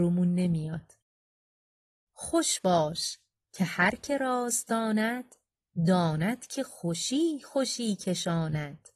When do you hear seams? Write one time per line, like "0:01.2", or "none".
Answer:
none